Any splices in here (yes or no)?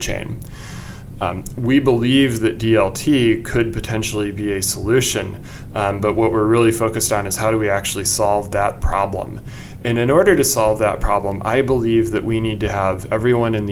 no